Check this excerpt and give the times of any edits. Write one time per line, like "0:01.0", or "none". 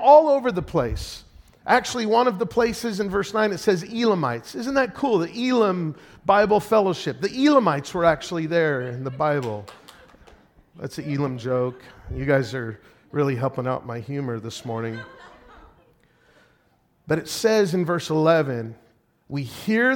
none